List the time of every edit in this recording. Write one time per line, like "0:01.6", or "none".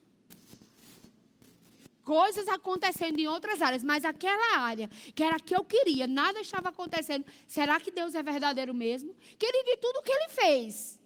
0:01.9